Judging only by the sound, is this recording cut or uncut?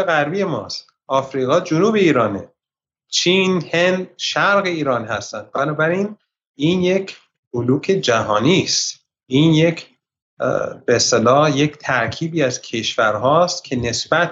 uncut